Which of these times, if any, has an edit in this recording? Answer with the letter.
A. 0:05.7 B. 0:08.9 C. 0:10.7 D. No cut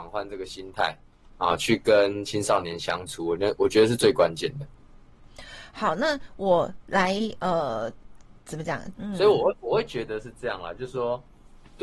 B